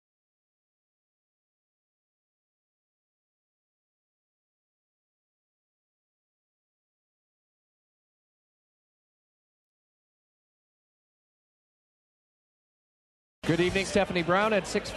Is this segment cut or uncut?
cut